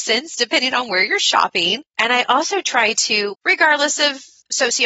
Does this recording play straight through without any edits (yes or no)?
no